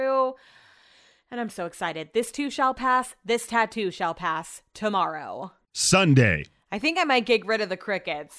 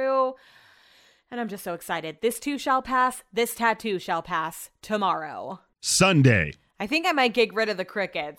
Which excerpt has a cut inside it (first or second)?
first